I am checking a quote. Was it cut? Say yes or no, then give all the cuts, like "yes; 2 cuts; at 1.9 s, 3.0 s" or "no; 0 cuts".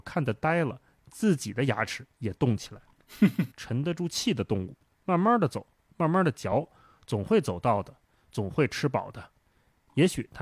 yes; 2 cuts; at 3.5 s, 5.0 s